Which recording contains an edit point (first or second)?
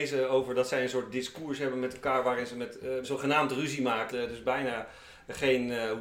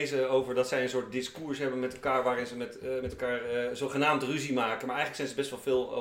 first